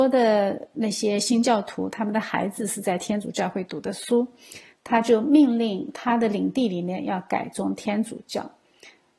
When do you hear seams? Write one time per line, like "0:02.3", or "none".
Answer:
0:04.7